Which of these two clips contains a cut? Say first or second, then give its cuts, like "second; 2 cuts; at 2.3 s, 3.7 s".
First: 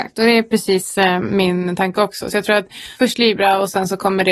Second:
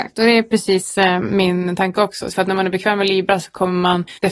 second; 1 cut; at 2.3 s